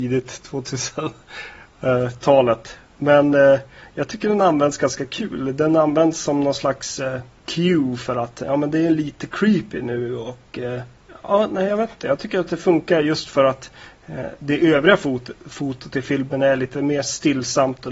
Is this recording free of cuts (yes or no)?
yes